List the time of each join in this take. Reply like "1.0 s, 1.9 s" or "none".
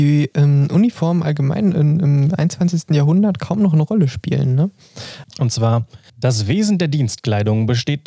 5.2 s

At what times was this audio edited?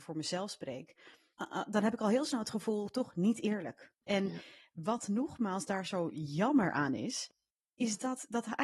4.0 s

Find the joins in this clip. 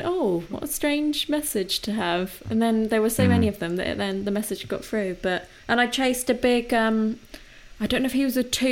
5.6 s

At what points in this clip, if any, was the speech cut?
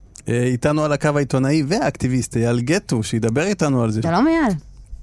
4.0 s

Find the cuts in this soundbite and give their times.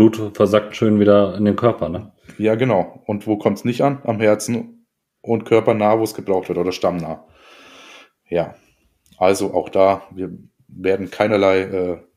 none

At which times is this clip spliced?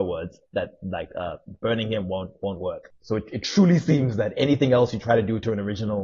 none

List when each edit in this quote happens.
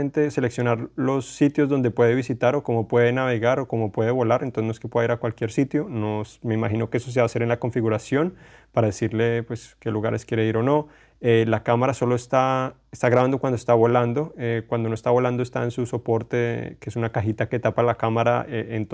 none

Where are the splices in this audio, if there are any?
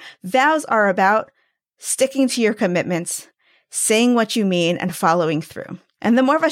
none

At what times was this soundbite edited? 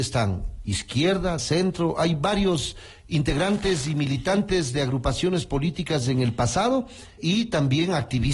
1.4 s, 7.2 s

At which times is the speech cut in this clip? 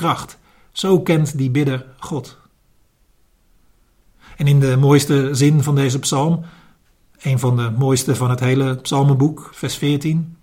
9.5 s

